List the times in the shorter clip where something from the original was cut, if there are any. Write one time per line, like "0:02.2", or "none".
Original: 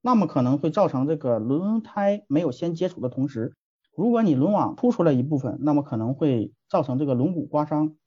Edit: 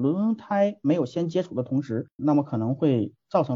0:02.2